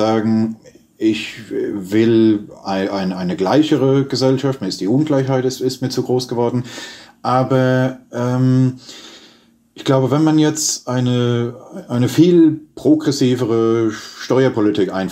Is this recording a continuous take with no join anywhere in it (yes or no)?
yes